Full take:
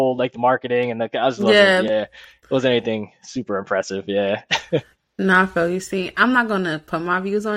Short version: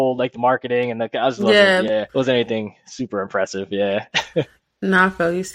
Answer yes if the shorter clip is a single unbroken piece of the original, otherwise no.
no